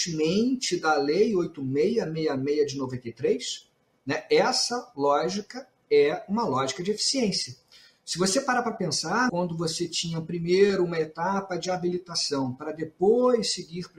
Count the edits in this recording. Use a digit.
1